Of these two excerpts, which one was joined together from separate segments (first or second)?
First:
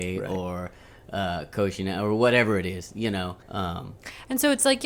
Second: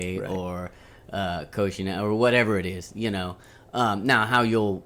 first